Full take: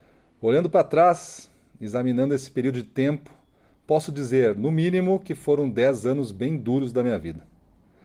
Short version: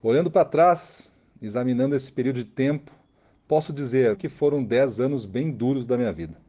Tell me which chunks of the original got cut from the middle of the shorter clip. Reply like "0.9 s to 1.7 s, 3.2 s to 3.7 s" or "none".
4.5 s to 5.2 s